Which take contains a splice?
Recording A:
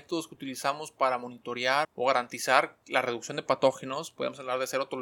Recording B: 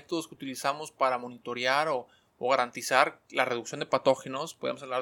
A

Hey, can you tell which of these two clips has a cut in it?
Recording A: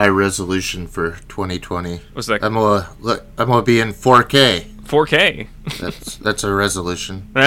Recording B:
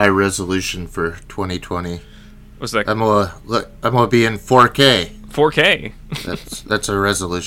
A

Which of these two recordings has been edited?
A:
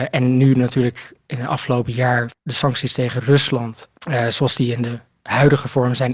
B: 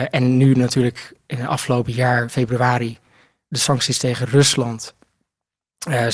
A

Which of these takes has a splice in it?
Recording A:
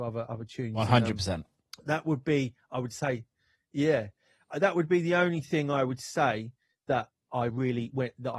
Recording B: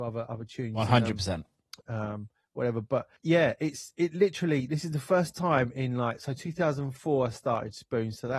B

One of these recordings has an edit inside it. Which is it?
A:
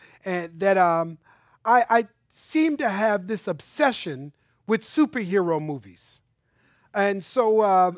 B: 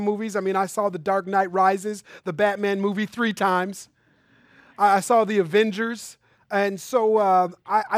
B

